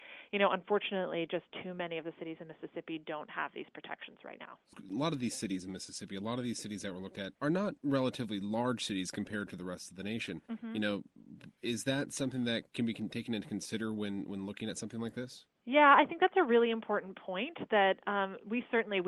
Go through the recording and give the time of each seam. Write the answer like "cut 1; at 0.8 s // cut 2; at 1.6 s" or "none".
none